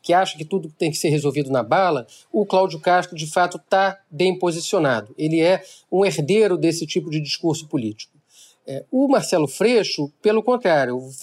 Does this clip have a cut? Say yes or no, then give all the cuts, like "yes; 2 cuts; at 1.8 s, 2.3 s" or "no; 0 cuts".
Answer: no; 0 cuts